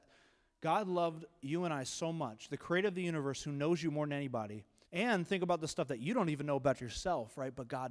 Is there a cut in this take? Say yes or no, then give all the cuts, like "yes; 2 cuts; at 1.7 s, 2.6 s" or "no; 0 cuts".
yes; 1 cut; at 4.8 s